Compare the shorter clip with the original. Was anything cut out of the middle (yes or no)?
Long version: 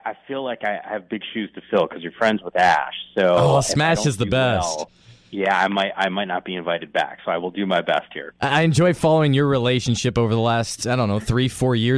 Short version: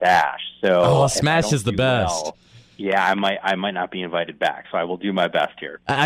no